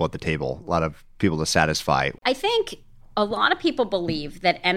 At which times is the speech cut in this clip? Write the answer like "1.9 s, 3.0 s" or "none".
2.2 s